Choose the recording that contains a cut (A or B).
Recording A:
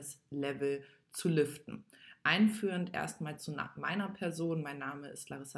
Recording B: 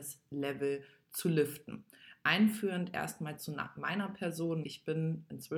B